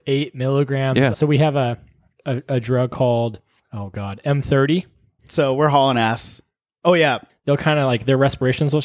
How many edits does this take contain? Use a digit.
3